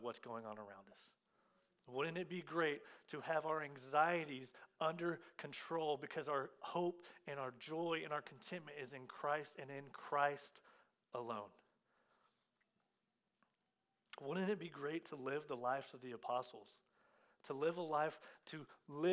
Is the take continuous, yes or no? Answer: yes